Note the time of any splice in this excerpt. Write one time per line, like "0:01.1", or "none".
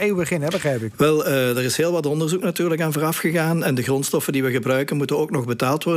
0:00.9